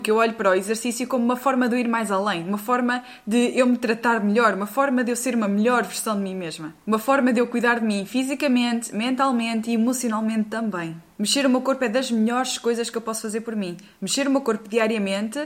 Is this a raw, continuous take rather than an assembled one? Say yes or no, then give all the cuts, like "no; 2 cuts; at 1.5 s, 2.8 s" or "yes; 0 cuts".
yes; 0 cuts